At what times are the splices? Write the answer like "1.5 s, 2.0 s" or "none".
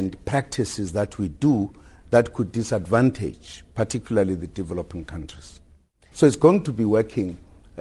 6.1 s